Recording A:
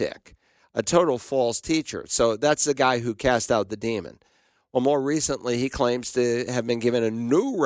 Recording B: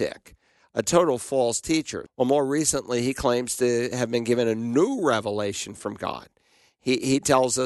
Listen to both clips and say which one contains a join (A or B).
B